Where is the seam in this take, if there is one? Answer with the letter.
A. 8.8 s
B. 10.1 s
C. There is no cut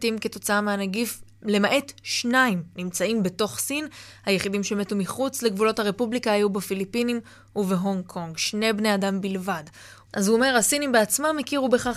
B